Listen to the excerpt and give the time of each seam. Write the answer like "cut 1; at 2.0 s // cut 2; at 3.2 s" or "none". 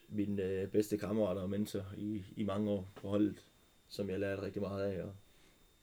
none